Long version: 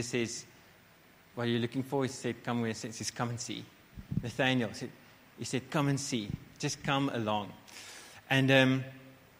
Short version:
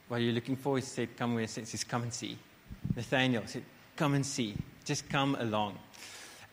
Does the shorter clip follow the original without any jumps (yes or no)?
no